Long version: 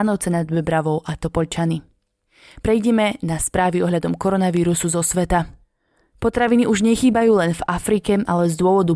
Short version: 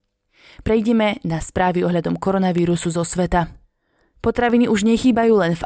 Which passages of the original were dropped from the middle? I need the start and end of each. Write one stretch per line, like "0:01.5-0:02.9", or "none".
none